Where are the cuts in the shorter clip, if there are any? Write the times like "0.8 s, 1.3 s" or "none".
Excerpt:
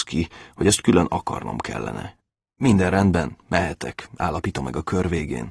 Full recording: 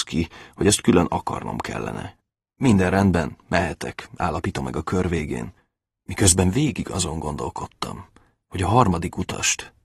none